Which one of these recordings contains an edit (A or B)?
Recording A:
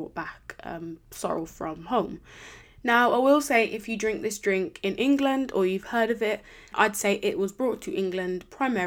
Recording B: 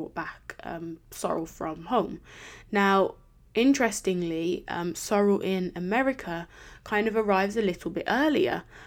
A